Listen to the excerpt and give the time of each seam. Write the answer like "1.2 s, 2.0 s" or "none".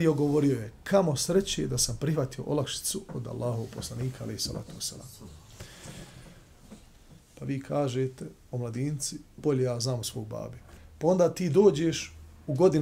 7.2 s

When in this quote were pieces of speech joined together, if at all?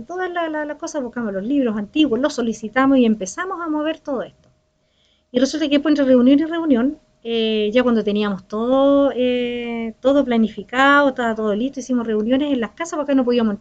none

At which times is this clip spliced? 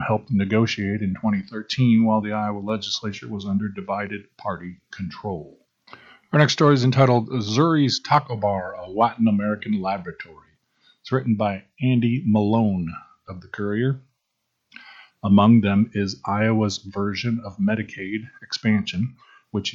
15.1 s

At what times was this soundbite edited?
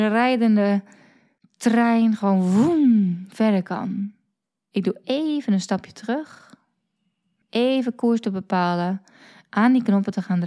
4.7 s

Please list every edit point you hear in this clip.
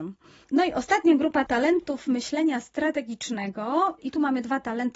1.5 s

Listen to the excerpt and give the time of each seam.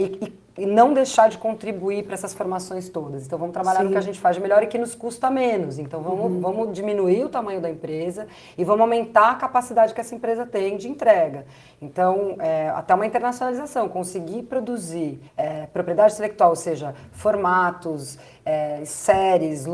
15.3 s

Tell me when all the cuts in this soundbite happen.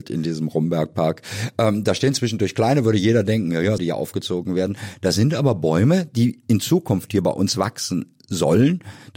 3.8 s

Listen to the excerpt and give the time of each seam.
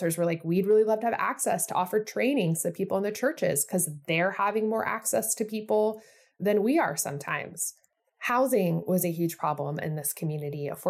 none

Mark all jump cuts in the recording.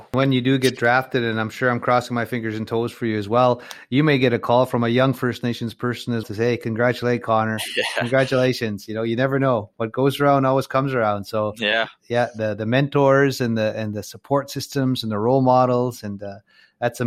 6.2 s

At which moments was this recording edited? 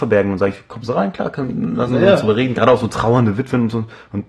none

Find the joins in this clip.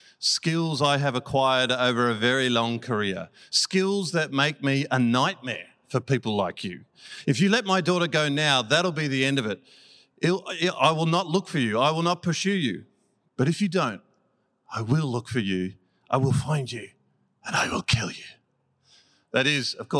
none

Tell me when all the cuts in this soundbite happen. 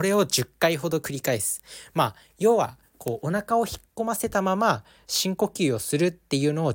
none

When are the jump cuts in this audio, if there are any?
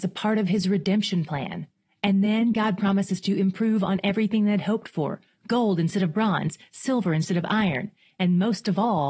none

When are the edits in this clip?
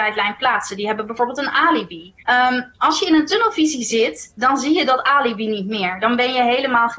2.2 s

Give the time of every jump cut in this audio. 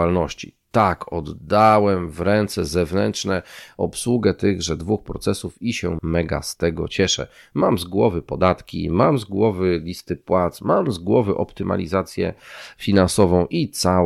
6.0 s

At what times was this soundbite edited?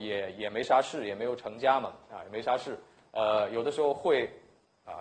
none

